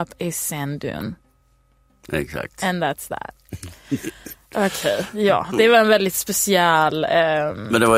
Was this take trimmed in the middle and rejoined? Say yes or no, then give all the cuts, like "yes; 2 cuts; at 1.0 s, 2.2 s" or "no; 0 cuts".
no; 0 cuts